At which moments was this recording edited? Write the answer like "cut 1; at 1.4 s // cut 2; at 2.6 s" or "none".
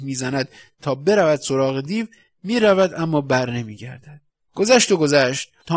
cut 1; at 4.4 s